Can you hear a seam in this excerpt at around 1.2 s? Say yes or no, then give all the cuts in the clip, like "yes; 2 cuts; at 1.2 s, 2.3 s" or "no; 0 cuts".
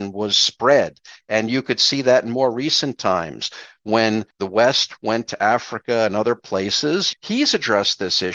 no; 2 cuts; at 4.3 s, 7.1 s